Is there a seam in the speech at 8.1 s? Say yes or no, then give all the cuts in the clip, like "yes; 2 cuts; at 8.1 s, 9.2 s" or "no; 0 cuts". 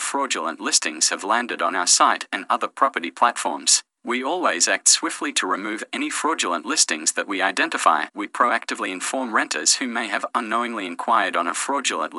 yes; 2 cuts; at 4.0 s, 8.1 s